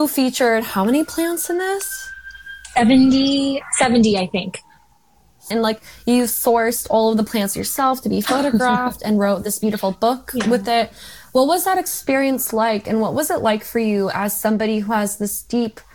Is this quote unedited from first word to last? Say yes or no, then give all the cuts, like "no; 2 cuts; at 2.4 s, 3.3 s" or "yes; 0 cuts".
no; 1 cut; at 5.5 s